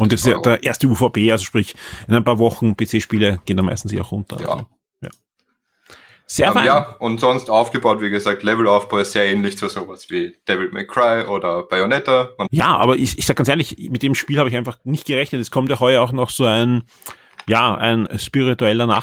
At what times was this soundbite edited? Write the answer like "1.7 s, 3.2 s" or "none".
12.5 s, 18.1 s